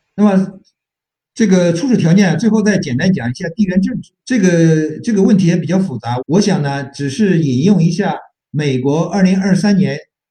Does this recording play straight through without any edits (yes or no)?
no